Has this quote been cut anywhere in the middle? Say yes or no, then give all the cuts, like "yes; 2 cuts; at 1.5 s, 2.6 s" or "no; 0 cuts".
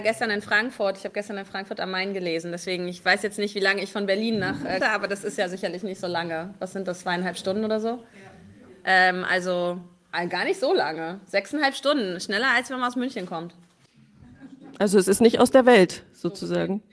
yes; 1 cut; at 4.8 s